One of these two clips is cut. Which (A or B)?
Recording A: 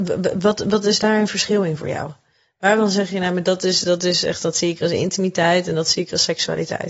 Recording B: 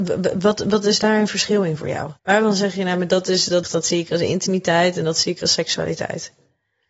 B